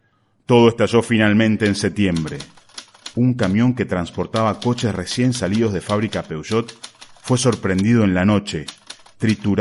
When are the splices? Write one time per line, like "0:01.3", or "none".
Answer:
none